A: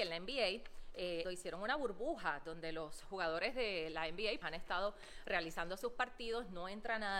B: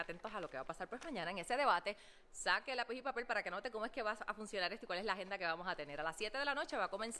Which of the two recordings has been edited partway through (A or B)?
A